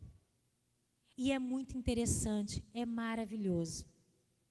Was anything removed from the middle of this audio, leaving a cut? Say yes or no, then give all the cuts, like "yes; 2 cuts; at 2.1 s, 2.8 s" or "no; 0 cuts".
yes; 1 cut; at 1.1 s